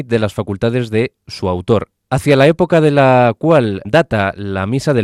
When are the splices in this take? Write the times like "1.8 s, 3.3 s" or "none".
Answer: 2.0 s, 3.8 s